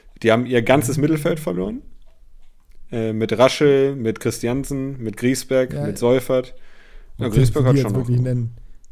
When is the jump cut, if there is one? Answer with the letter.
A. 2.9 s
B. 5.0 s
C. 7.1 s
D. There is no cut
C